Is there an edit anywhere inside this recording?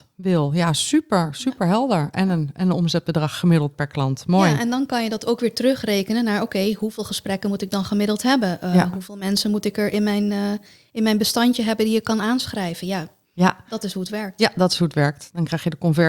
no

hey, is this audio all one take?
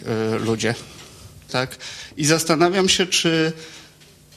no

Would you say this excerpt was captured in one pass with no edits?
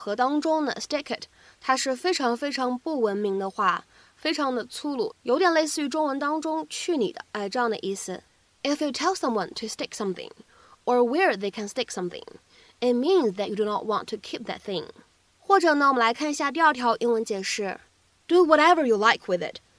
yes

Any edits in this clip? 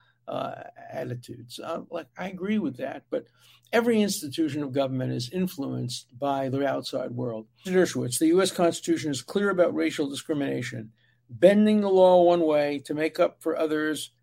yes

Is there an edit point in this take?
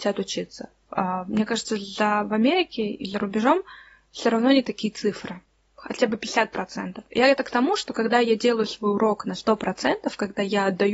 no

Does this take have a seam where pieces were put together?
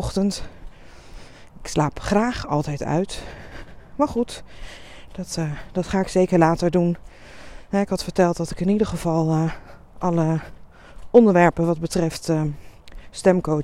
no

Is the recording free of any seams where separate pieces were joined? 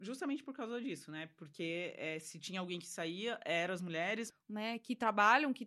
no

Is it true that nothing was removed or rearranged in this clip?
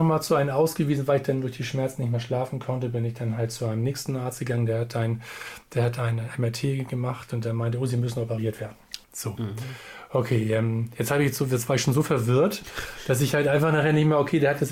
no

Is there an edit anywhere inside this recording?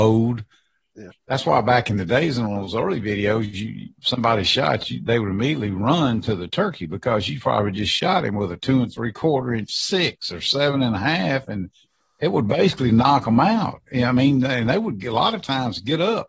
yes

